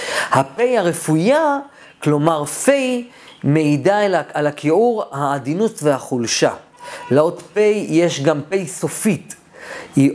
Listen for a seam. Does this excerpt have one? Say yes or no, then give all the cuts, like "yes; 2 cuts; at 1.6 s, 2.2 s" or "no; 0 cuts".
no; 0 cuts